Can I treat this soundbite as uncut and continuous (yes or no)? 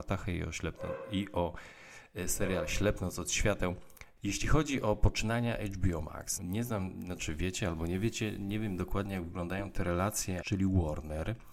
no